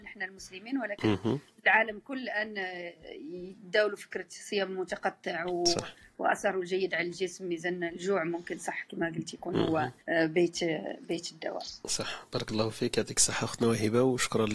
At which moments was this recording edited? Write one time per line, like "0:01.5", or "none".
0:10.0

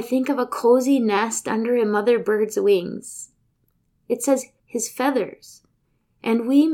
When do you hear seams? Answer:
0:04.6

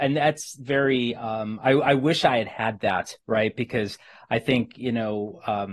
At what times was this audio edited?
none

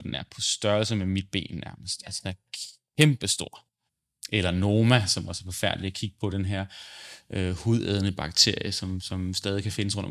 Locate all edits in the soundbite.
none

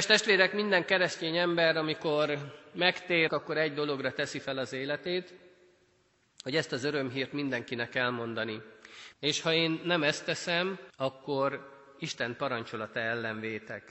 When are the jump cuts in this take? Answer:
0:03.3
0:09.1
0:10.9

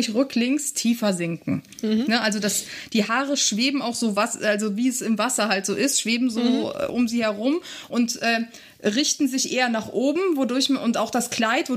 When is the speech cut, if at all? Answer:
none

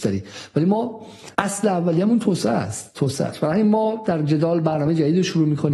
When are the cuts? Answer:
0:01.3

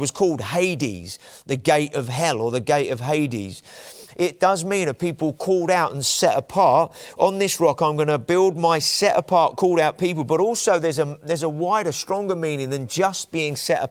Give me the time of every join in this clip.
0:04.1

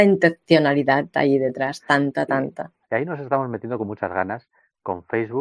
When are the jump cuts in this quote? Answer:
0:02.8

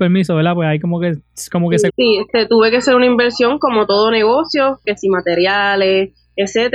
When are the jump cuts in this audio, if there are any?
0:01.9
0:04.8

